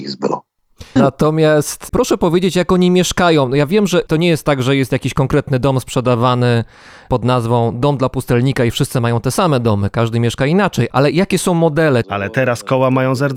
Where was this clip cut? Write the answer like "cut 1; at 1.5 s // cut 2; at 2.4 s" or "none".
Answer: cut 1; at 1.0 s // cut 2; at 10.9 s // cut 3; at 12.0 s